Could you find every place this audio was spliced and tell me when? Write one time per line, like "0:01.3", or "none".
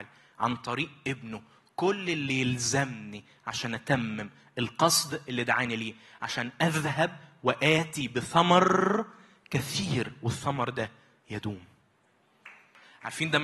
none